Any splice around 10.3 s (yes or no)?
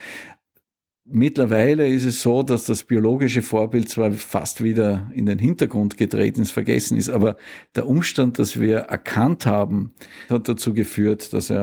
yes